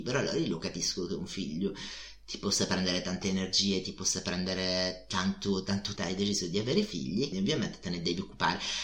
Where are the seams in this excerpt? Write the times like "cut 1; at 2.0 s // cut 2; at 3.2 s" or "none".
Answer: cut 1; at 6.0 s // cut 2; at 7.3 s